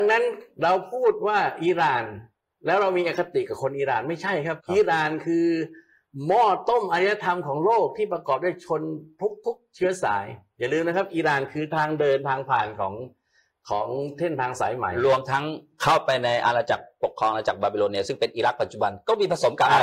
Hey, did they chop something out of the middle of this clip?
yes; 2 cuts; at 4.6 s, 17.0 s

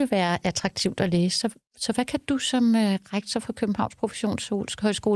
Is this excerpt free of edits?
yes; 0 cuts

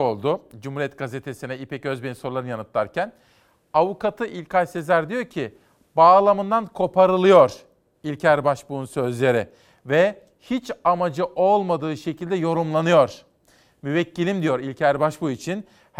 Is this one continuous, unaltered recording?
yes; 0 cuts

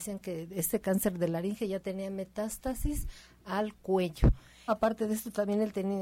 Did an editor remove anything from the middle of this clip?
yes; 1 cut; at 4.7 s

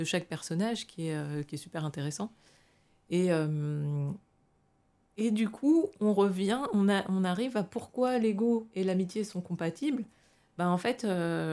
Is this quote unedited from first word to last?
yes; 0 cuts

